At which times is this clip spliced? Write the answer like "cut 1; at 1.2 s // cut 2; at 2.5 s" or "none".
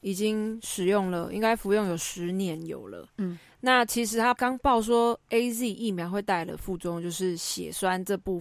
none